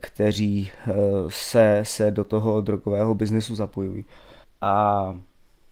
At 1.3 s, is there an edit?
no; 1 cut; at 4.4 s

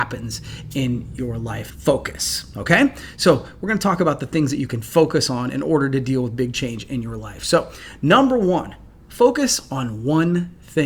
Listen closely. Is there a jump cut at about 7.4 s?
no; 1 cut; at 1.7 s

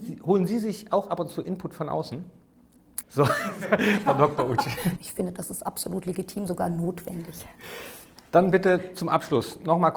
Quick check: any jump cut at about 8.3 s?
no; 2 cuts; at 3.0 s, 5.0 s

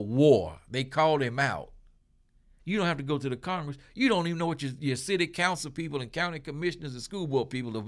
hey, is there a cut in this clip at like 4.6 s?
no; 1 cut; at 2.6 s

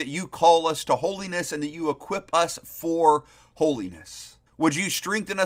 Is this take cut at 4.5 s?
yes; 1 cut; at 4.5 s

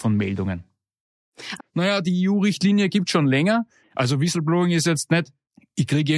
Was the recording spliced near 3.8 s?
yes; 2 cuts; at 1.6 s, 3.8 s

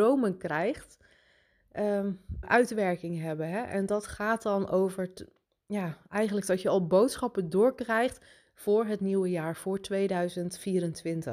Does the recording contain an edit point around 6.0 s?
no; 1 cut; at 2.4 s

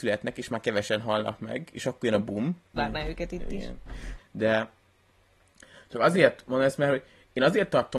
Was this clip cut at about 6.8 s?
no; 2 cuts; at 2.8 s, 4.2 s

